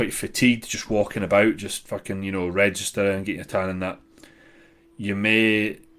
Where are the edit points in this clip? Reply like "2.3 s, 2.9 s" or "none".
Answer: none